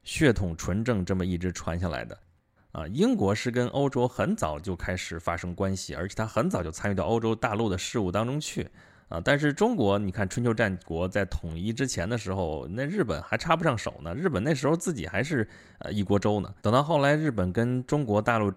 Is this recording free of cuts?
no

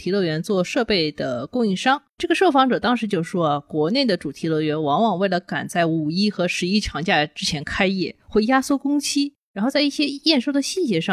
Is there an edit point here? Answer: no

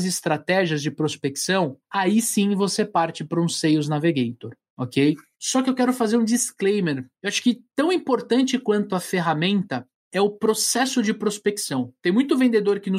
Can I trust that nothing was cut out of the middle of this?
yes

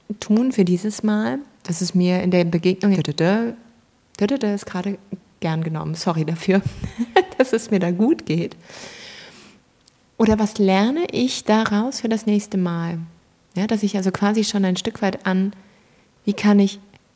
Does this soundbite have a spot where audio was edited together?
yes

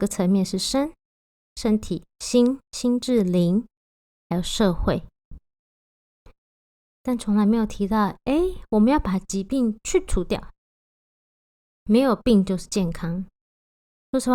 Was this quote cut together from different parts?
no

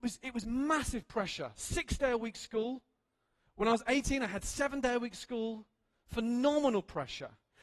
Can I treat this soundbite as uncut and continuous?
yes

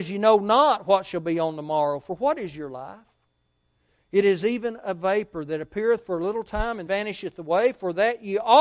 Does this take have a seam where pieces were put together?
yes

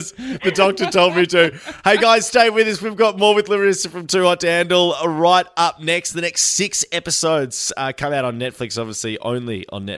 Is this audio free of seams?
yes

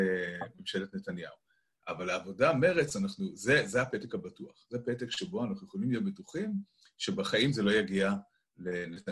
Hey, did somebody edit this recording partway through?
no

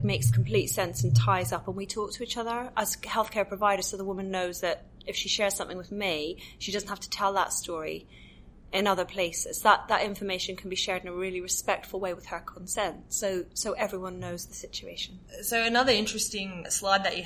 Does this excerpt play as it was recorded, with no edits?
yes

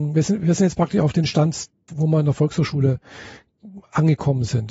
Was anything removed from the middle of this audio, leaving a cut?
yes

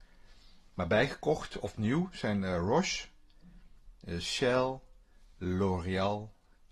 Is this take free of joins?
yes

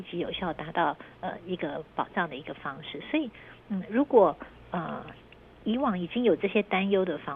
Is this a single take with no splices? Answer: yes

